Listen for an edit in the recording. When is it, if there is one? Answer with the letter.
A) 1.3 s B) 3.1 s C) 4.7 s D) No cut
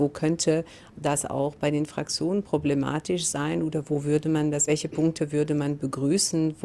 D